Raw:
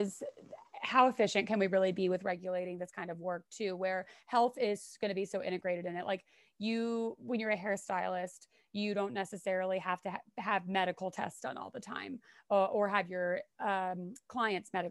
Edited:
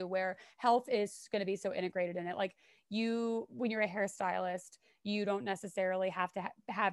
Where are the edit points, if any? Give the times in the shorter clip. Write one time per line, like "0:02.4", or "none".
none